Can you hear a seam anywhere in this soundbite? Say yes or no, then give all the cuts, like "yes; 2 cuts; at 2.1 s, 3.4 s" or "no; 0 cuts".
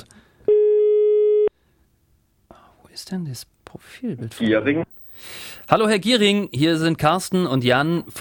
yes; 1 cut; at 3.5 s